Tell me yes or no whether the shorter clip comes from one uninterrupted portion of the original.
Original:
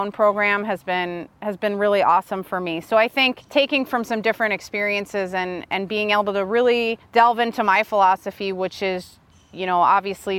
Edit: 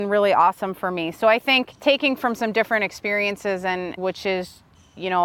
no